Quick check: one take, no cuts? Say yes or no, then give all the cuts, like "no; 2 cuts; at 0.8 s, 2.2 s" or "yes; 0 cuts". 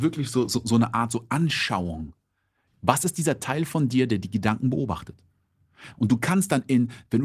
no; 2 cuts; at 2.7 s, 5.9 s